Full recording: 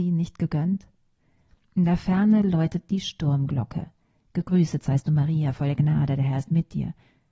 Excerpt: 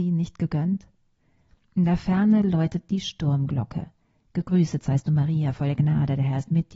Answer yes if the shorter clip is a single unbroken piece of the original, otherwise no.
yes